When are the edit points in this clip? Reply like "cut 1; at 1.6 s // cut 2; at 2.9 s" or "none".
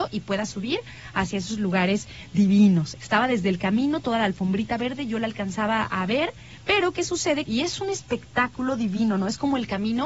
cut 1; at 3.0 s // cut 2; at 7.4 s